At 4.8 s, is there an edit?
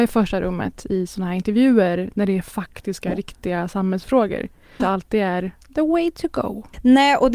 yes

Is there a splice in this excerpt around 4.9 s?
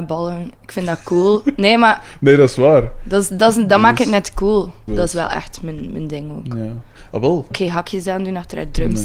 yes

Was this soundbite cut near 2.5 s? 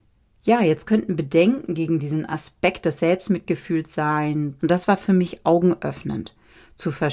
no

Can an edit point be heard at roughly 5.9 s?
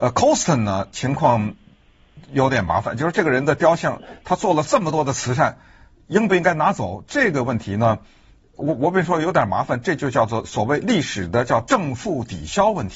no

